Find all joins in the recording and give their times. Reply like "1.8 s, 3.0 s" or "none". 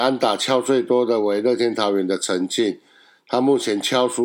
none